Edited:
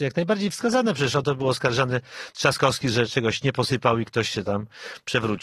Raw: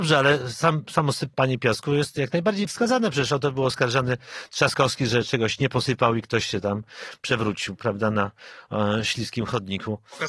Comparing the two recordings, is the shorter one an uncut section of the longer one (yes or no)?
yes